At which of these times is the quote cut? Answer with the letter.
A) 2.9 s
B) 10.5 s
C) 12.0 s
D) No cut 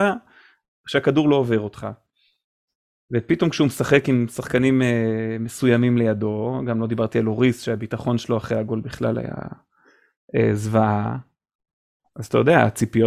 D